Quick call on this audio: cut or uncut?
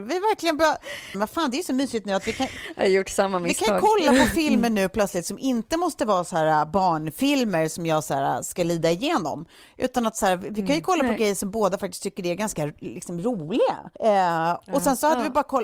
cut